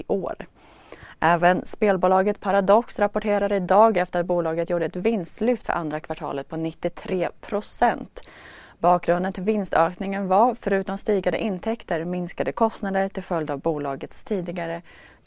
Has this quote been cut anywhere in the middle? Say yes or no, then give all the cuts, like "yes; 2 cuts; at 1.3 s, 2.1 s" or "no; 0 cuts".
no; 0 cuts